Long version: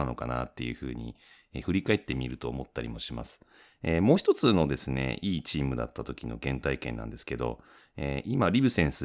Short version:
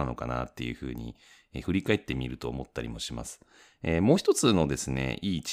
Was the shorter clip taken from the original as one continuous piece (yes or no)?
yes